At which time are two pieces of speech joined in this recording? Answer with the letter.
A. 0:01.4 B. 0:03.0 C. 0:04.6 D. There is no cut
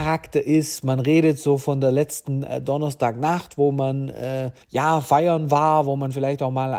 C